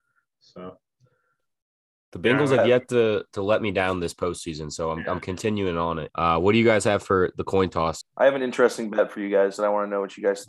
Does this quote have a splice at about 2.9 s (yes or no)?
no